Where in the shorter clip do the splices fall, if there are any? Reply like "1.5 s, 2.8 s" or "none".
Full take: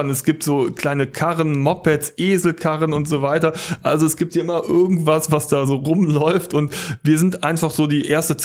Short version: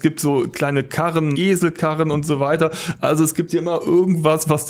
1.3 s